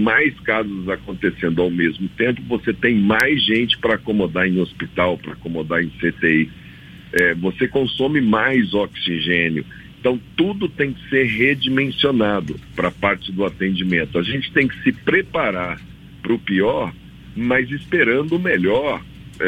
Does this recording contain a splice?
no; 0 cuts

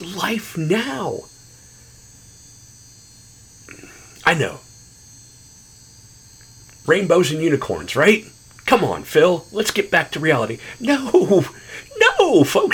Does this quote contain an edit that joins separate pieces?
no; 0 cuts

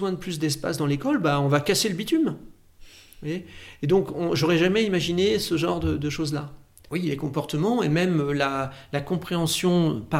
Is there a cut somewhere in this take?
yes; 1 cut; at 6.9 s

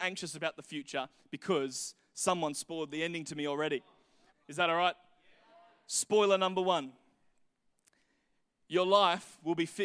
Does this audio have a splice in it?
yes; 1 cut; at 4.3 s

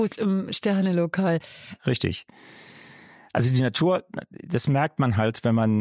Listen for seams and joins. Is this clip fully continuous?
no; 1 cut; at 1.8 s

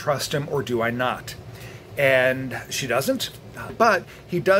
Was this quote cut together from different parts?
yes; 1 cut; at 3.7 s

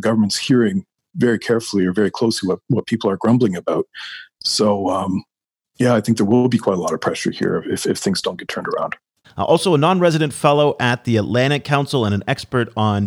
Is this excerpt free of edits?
no; 1 cut; at 9.2 s

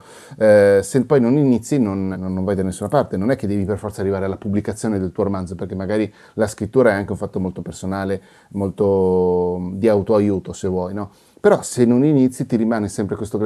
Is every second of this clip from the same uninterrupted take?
no; 1 cut; at 2.1 s

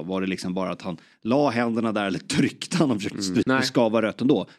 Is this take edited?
yes; 1 cut; at 3.4 s

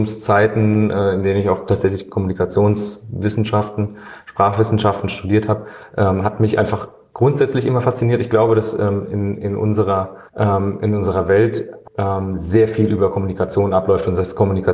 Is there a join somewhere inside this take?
yes; 2 cuts; at 10.3 s, 11.8 s

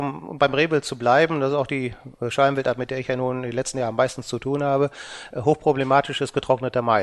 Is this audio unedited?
yes; 0 cuts

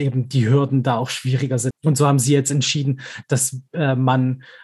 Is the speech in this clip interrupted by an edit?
yes; 1 cut; at 1.7 s

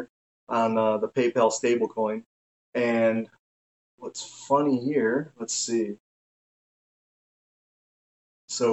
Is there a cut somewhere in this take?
no; 0 cuts

